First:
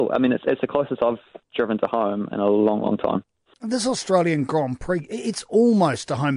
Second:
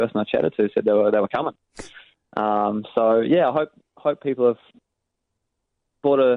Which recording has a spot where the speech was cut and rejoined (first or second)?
first